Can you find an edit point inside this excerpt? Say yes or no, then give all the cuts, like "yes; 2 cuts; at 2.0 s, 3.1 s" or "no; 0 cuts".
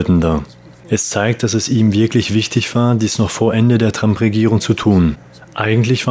no; 0 cuts